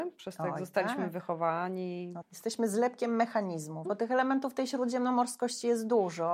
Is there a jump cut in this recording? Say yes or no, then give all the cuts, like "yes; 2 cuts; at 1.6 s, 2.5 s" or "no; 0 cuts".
yes; 2 cuts; at 2.2 s, 3.9 s